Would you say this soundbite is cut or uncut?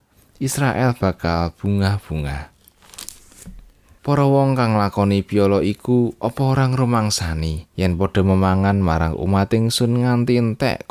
cut